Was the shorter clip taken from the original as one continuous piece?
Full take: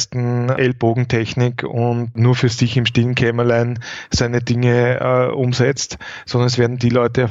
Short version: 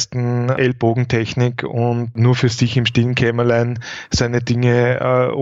yes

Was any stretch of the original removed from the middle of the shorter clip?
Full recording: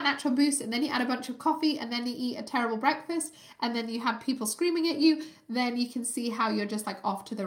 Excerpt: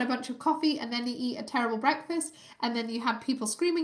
no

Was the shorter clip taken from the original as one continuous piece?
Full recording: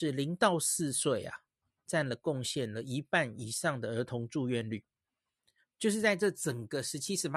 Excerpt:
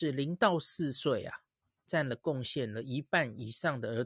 yes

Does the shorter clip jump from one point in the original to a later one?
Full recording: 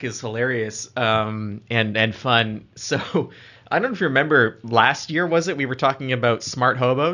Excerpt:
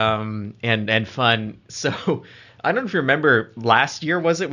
no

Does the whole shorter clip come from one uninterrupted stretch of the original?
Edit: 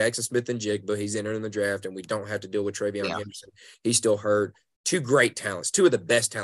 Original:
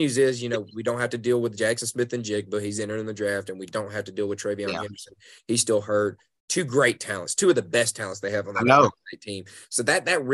yes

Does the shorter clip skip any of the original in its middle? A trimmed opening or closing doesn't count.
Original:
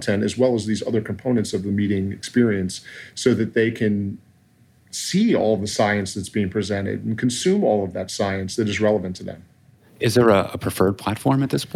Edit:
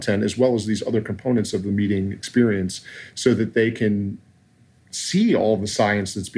no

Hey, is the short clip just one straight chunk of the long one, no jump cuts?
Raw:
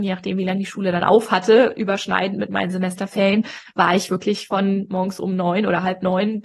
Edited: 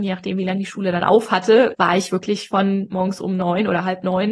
no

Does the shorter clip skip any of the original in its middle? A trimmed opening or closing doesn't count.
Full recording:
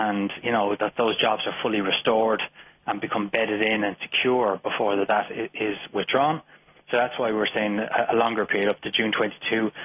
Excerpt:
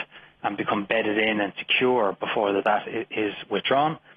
no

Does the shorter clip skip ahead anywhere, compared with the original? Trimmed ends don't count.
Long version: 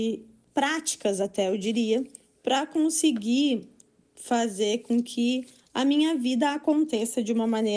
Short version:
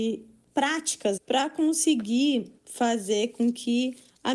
yes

